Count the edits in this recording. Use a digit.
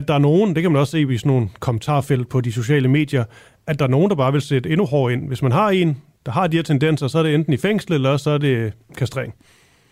0